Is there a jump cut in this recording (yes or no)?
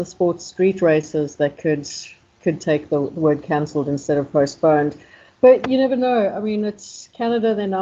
no